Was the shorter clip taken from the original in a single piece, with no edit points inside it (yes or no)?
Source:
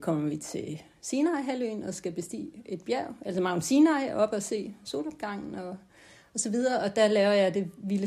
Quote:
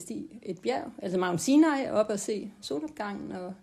yes